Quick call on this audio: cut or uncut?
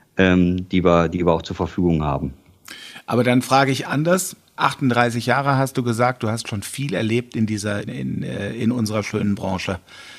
cut